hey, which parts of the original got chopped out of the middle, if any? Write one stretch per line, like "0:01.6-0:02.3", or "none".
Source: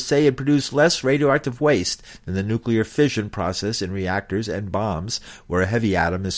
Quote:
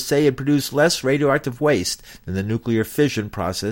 none